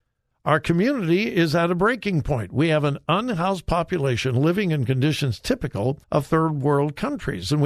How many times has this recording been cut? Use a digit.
1